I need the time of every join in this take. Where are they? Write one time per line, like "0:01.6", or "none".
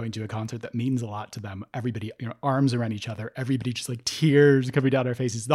none